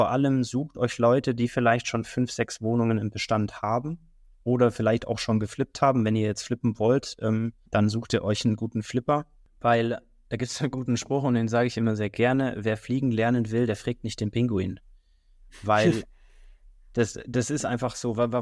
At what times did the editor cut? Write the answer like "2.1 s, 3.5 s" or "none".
7.6 s